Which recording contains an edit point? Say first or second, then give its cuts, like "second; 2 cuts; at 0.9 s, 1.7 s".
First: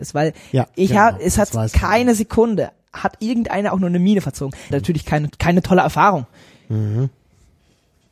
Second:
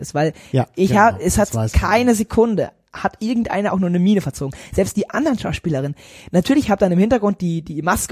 first; 1 cut; at 4.7 s